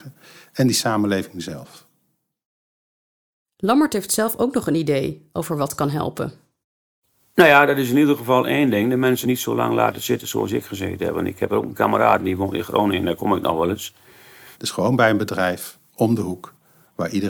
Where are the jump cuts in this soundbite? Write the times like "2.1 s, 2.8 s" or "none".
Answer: 9.2 s, 14.5 s

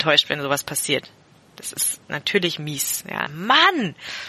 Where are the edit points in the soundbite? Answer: 3.3 s

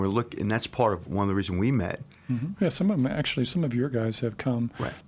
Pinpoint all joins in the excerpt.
2.6 s

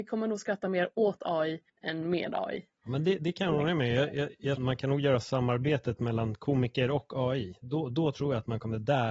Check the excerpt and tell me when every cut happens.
1.7 s, 3.2 s, 4.6 s

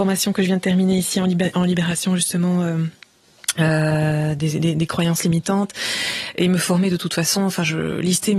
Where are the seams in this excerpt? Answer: none

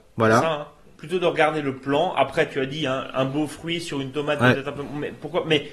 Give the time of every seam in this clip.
none

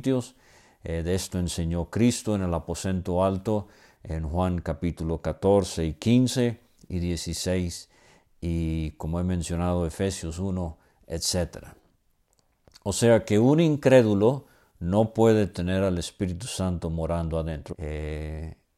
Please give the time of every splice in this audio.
17.7 s

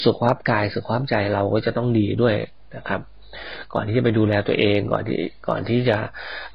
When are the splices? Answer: none

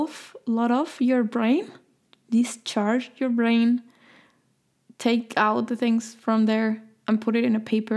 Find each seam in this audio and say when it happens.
none

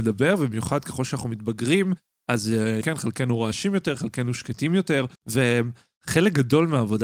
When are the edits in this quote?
2.8 s, 5.2 s

